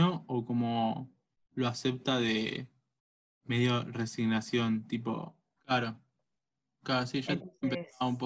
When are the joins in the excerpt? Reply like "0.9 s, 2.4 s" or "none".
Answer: 5.6 s